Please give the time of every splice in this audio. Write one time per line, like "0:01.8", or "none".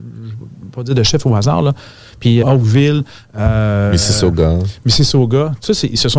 0:02.4